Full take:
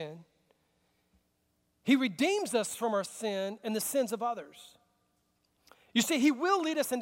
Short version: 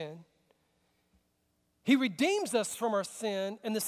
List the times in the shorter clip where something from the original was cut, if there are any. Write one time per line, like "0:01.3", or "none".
none